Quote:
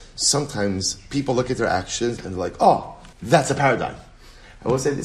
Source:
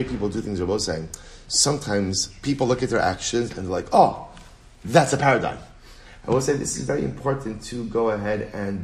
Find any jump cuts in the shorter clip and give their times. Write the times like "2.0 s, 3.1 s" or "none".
3.1 s

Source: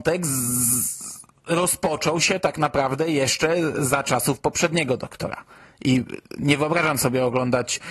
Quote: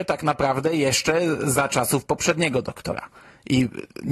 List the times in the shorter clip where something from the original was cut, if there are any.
none

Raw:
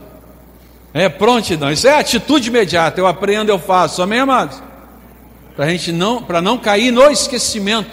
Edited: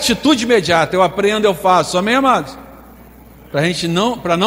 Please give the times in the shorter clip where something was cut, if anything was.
none

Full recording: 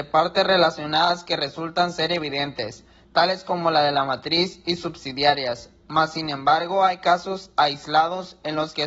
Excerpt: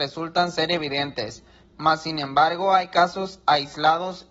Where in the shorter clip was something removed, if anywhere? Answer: 1.7 s

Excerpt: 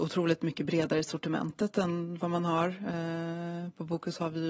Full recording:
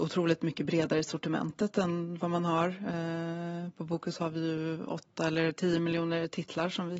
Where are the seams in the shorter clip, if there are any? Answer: none

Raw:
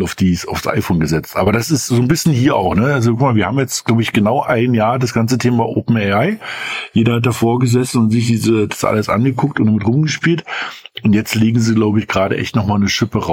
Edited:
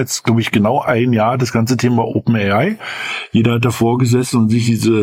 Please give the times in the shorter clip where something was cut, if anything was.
none

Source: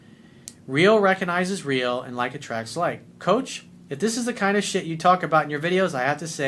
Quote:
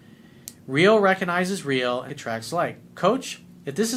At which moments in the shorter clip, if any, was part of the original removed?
2.1 s

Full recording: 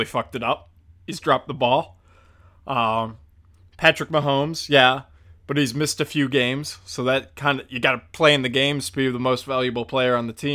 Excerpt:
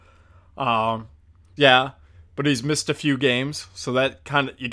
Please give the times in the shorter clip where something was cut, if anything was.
1.6 s

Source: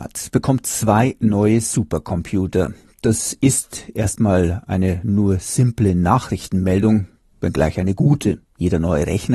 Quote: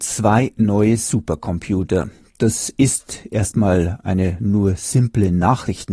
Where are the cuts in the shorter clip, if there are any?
none

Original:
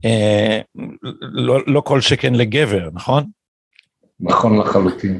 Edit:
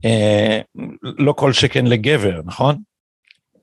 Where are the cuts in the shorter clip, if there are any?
1.2 s

